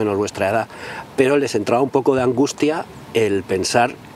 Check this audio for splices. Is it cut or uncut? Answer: uncut